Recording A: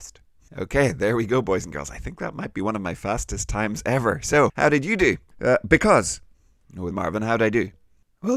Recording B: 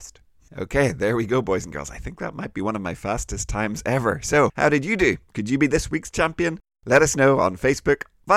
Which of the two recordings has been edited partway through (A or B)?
A